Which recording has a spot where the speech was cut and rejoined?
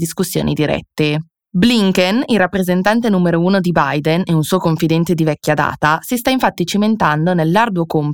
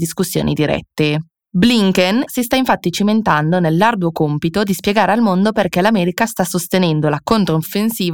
second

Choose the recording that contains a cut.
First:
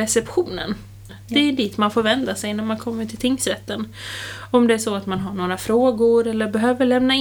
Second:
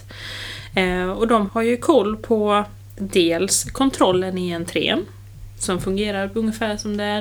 first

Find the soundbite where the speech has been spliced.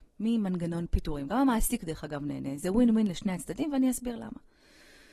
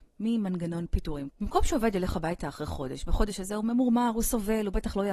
second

